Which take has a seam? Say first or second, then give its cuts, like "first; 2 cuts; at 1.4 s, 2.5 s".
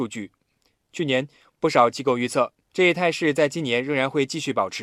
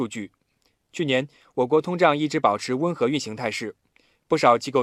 first; 1 cut; at 1.5 s